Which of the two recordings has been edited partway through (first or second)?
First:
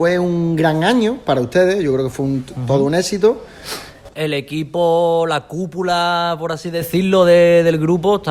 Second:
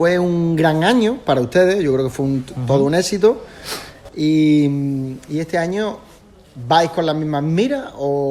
first